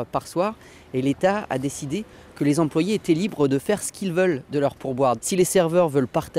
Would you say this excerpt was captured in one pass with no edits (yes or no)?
no